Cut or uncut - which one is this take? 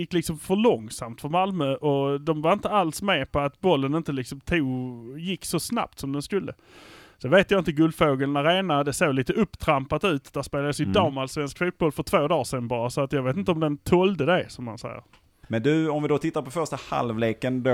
cut